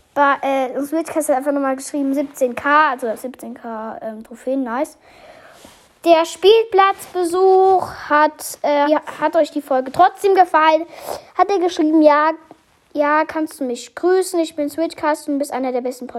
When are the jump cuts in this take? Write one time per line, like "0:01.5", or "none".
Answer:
0:08.8